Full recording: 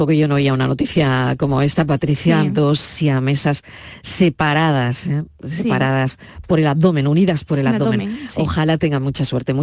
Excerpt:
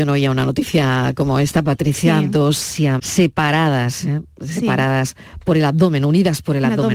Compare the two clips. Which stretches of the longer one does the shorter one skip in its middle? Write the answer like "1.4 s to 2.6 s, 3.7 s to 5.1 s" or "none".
3.2 s to 4.0 s